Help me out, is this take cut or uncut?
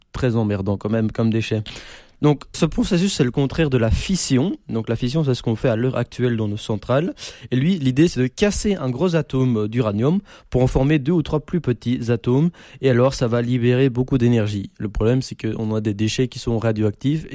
cut